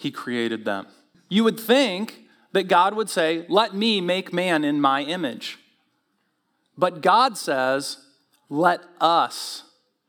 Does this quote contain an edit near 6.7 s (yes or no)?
no